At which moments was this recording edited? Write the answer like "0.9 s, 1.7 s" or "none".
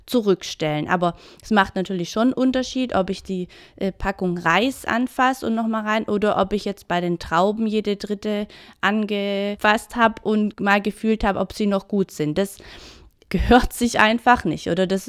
none